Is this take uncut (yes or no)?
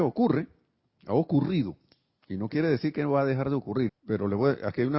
no